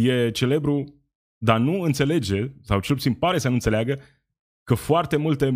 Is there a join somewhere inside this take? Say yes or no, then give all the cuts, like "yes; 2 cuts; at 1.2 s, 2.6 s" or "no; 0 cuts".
no; 0 cuts